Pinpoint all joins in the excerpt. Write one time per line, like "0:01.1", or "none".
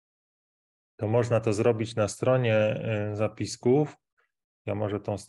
none